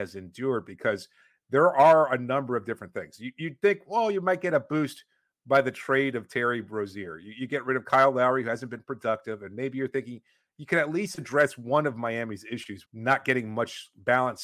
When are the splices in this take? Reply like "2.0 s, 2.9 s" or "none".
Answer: 12.9 s